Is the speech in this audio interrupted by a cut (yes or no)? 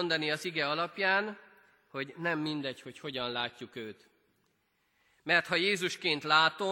no